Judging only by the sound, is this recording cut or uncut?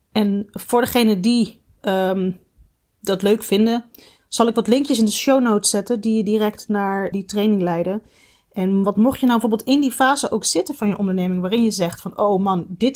cut